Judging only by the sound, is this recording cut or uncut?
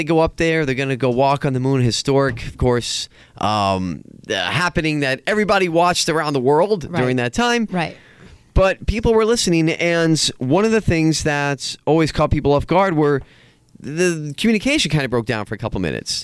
uncut